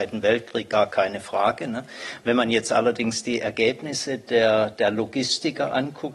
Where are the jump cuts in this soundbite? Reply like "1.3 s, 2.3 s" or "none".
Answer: none